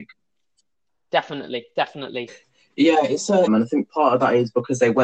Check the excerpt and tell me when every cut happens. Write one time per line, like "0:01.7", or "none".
0:02.3
0:03.5